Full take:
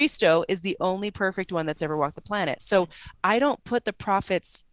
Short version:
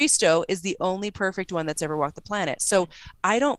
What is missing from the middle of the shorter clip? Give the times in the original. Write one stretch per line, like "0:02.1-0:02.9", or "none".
none